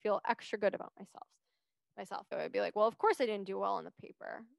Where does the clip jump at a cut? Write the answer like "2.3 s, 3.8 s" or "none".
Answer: 2.3 s